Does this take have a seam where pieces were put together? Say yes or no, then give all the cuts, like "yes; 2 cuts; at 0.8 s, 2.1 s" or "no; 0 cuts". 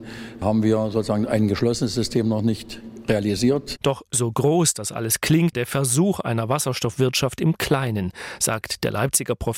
yes; 2 cuts; at 3.8 s, 5.5 s